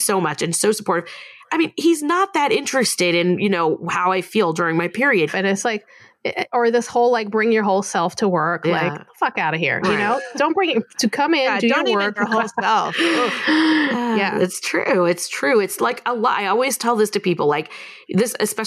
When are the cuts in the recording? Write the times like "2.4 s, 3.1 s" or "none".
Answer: 5.3 s, 12.2 s